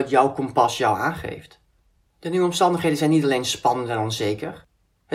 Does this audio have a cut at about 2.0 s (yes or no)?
no